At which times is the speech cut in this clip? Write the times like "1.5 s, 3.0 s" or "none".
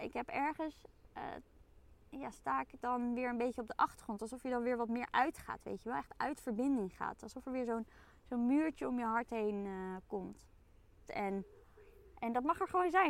11.1 s